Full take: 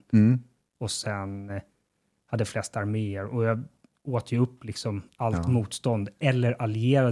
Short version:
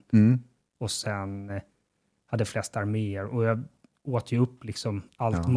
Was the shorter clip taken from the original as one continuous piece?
yes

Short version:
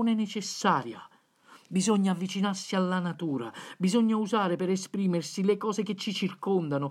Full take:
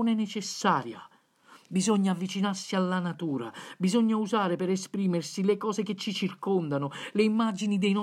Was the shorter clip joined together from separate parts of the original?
no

